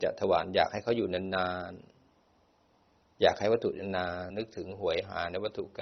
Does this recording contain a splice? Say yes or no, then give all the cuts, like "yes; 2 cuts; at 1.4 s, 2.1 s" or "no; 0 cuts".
yes; 1 cut; at 4.3 s